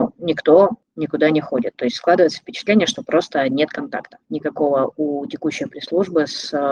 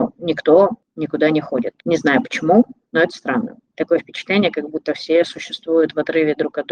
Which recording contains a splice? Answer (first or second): second